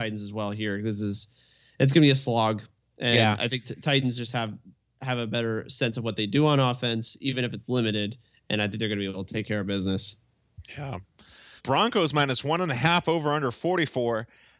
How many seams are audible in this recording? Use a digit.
1